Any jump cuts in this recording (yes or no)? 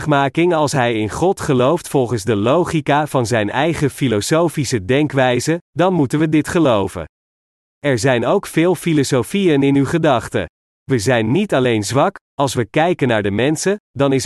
no